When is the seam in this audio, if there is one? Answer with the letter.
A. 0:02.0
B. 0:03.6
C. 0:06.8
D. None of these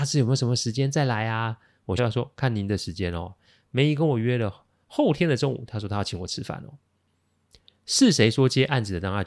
A